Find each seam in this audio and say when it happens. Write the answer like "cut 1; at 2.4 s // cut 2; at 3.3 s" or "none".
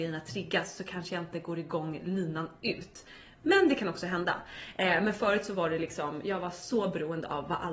none